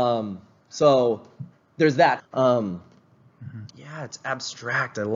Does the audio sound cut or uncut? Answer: cut